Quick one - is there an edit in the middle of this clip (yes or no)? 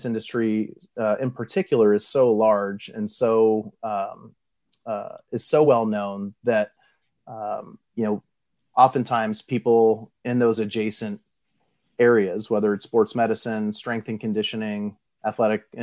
no